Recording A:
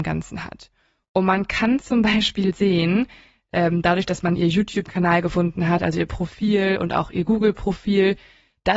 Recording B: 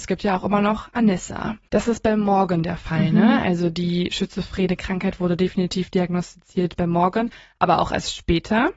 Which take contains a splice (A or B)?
B